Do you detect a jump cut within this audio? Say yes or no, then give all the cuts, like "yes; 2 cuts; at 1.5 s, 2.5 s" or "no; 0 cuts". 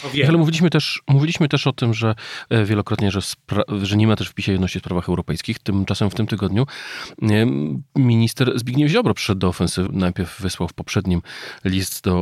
yes; 1 cut; at 9.9 s